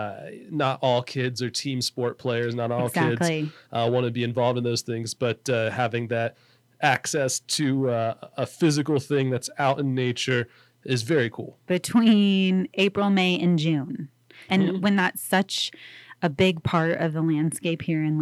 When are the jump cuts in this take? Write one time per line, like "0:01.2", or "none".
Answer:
0:11.7
0:14.5

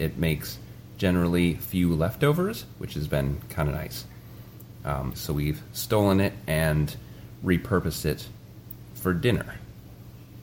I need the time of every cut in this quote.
0:05.1

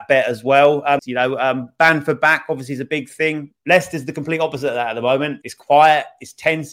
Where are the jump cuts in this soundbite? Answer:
0:01.0
0:03.5
0:05.4

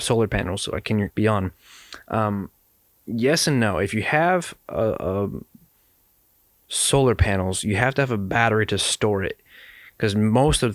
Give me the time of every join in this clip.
0:01.1

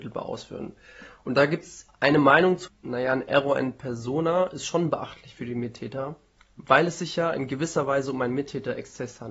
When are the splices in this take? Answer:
0:02.7

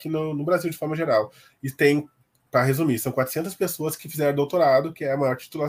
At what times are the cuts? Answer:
none

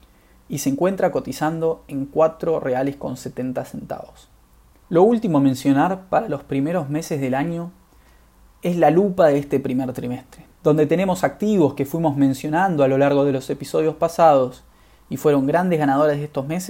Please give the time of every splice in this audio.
0:04.8
0:10.5

